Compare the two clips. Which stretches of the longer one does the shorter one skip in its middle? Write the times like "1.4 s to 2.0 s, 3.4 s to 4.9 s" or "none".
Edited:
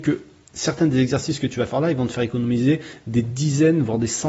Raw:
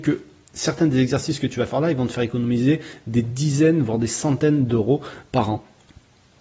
none